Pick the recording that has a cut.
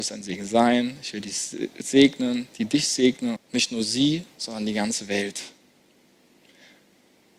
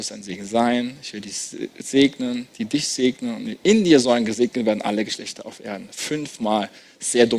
first; 1 cut; at 3.4 s

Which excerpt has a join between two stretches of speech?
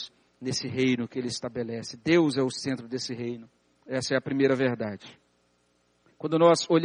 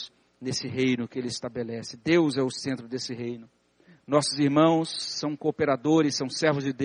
first; 1 cut; at 3.7 s

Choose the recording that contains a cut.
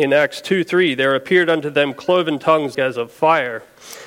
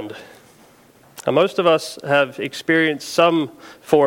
first; 1 cut; at 2.7 s

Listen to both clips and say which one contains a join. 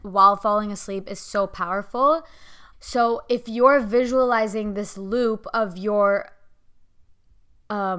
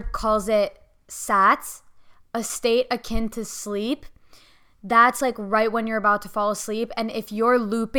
first; 1 cut; at 2.7 s

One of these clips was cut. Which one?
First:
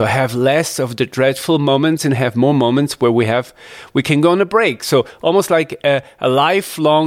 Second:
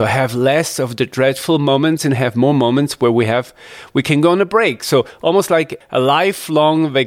second; 1 cut; at 5.8 s

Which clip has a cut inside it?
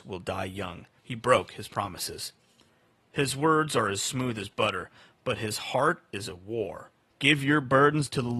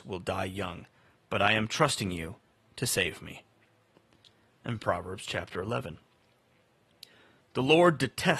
first; 2 cuts; at 1.0 s, 7.1 s

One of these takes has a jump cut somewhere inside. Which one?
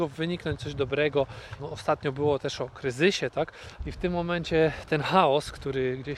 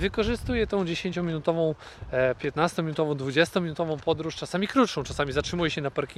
first; 2 cuts; at 1.6 s, 3.8 s

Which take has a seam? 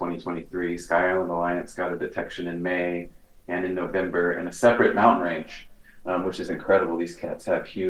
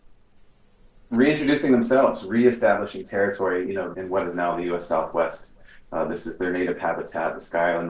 second; 1 cut; at 3.9 s

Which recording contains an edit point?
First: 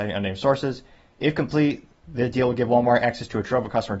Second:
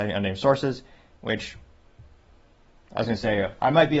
second; 1 cut; at 1.1 s

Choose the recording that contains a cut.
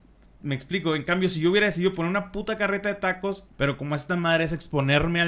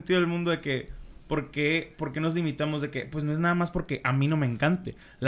first; 1 cut; at 3.5 s

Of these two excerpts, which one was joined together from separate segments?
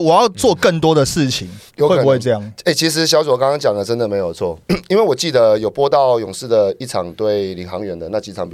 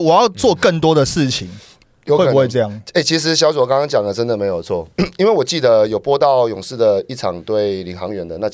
first; 1 cut; at 1.7 s

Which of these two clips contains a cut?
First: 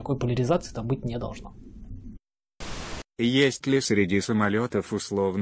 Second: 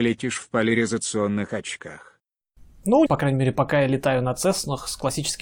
second; 1 cut; at 3.1 s

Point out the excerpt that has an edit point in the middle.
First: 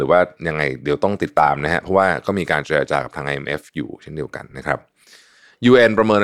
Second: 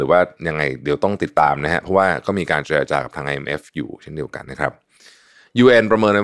second; 1 cut; at 4.4 s

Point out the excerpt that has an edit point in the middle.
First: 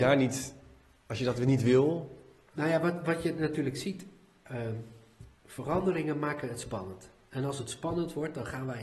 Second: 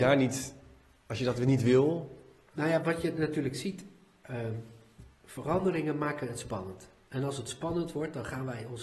second; 1 cut; at 2.8 s

